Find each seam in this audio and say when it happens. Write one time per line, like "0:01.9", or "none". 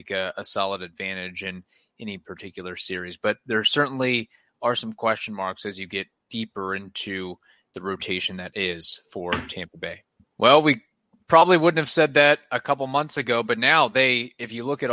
0:10.4